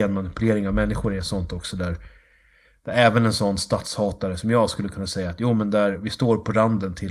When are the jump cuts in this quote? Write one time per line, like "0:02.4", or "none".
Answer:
0:05.9